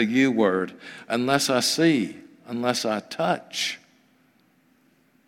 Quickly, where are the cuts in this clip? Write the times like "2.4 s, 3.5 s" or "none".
none